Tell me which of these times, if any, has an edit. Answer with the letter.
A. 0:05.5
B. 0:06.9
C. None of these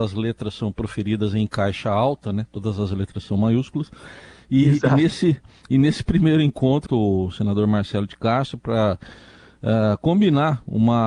B